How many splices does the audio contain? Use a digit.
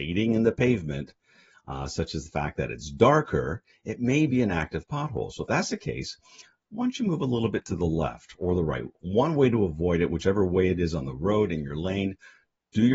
0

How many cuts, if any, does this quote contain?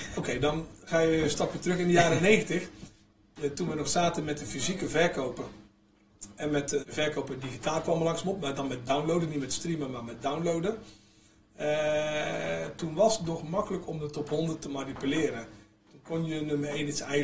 1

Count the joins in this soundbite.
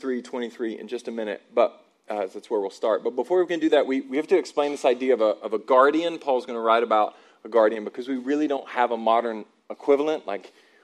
0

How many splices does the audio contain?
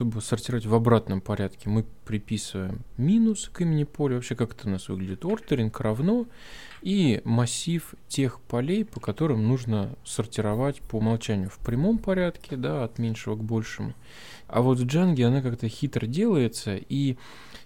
1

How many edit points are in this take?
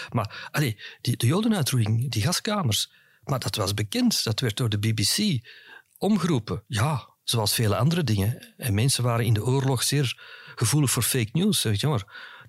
1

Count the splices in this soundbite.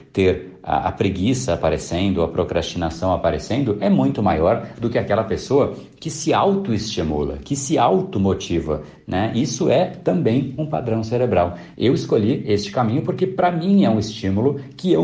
1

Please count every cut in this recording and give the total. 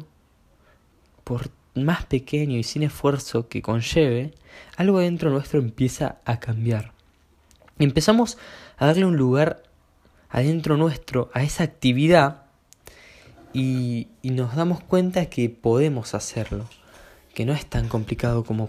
0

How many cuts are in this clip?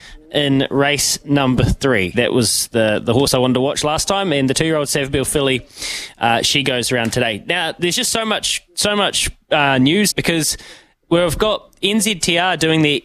2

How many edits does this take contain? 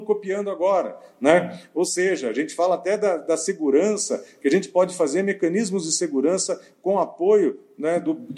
0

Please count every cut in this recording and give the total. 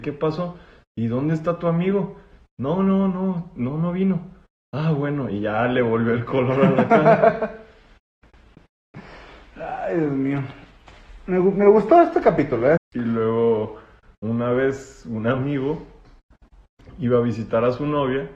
1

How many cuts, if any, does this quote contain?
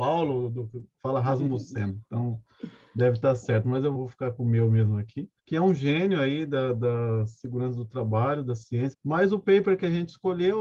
3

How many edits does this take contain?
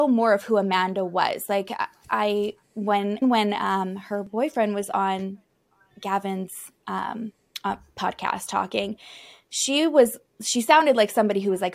1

